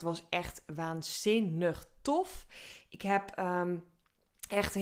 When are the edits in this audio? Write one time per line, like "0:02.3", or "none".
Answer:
none